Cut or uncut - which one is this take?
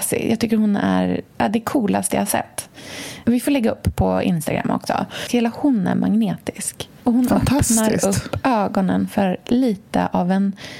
cut